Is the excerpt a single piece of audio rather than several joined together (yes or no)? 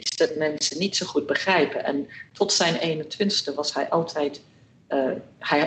yes